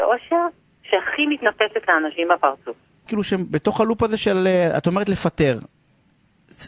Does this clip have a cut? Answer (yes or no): yes